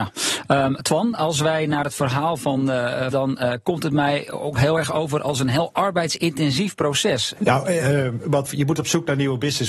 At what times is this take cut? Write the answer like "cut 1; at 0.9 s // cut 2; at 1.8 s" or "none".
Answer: cut 1; at 3.1 s // cut 2; at 7.3 s // cut 3; at 8.4 s